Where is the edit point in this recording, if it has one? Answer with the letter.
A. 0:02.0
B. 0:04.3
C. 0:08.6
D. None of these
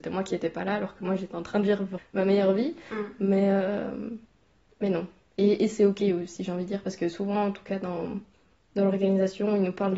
A